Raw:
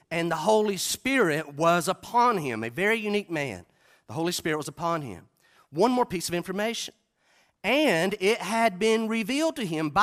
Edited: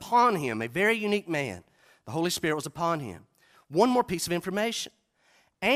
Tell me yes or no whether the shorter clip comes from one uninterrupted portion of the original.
yes